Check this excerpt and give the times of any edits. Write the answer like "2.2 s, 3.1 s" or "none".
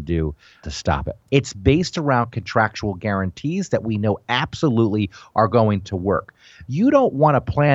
1.3 s, 6.7 s